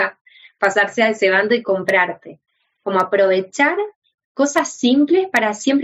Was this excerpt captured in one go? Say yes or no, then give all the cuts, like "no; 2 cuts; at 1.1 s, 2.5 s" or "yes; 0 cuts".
yes; 0 cuts